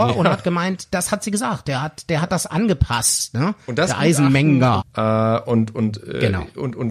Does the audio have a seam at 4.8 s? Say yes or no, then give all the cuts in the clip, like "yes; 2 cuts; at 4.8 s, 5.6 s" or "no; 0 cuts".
yes; 1 cut; at 4.8 s